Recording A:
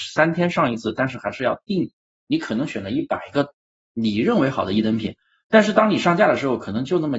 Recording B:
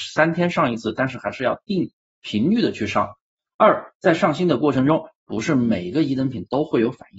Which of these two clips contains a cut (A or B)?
A